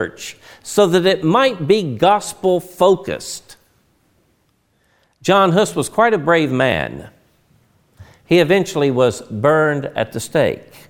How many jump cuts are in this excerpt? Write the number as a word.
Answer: zero